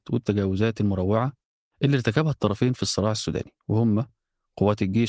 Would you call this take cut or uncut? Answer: uncut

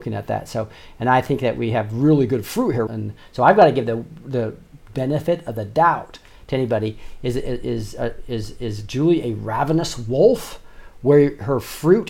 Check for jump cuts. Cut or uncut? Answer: cut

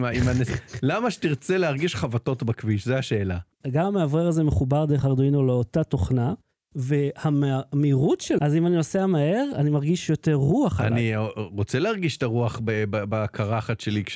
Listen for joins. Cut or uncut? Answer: cut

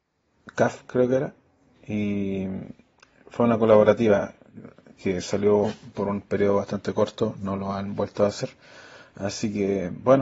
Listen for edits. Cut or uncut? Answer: uncut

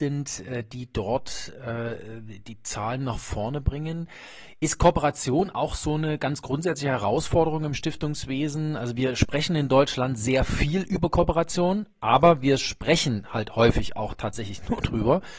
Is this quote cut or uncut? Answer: uncut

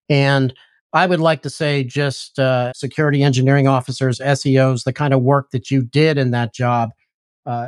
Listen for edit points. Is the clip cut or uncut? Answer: cut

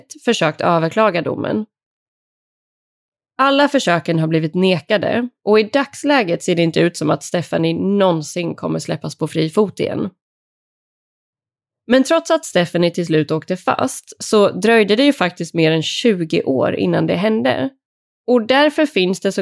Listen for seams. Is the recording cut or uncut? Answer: uncut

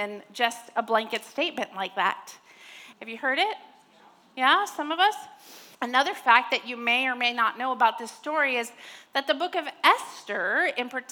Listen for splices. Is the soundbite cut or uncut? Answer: cut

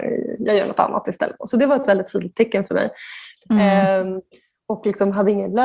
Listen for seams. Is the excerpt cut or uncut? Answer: cut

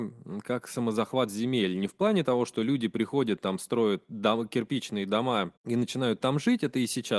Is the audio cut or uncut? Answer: cut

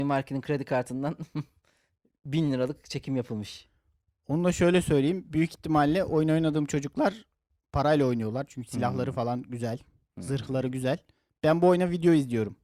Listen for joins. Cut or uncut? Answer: uncut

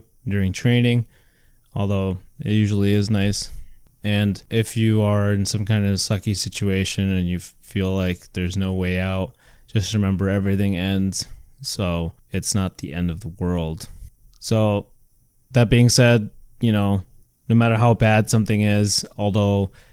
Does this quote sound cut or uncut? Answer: uncut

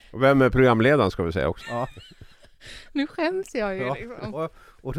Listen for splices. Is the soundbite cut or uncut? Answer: cut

